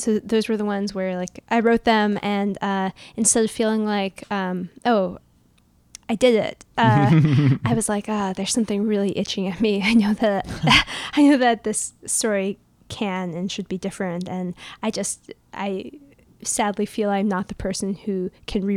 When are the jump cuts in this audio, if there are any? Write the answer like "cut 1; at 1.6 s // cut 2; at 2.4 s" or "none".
none